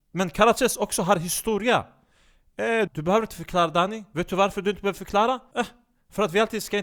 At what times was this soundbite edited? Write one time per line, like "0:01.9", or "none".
0:02.9
0:05.5